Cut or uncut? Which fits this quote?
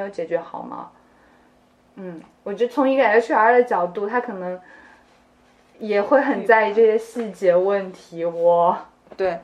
uncut